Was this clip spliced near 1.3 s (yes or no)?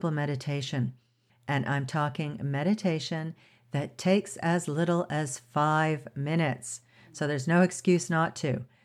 yes